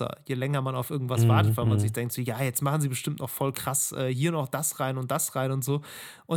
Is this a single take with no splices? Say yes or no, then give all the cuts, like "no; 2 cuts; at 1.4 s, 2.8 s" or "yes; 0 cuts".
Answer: yes; 0 cuts